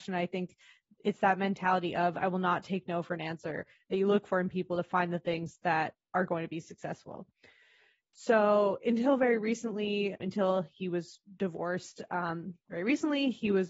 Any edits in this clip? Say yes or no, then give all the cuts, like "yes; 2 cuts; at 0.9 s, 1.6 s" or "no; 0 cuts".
yes; 1 cut; at 10.2 s